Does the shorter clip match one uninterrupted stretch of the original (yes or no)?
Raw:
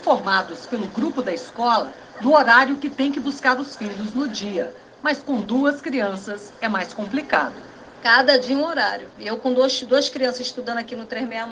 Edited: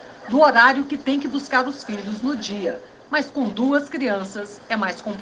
yes